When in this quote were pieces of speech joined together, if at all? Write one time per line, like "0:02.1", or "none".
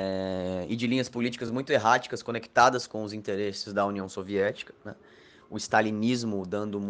none